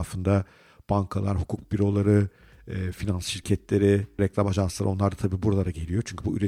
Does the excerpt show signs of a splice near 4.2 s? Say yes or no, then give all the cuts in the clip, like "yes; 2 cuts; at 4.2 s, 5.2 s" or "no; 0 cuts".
yes; 1 cut; at 4.2 s